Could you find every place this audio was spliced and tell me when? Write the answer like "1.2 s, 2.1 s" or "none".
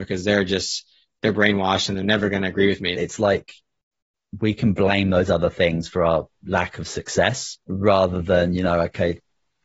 2.9 s, 7.6 s